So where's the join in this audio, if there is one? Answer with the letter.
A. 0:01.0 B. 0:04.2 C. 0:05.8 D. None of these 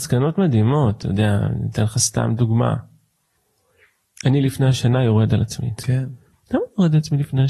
C